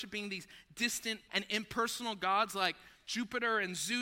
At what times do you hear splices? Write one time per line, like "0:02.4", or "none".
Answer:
0:01.3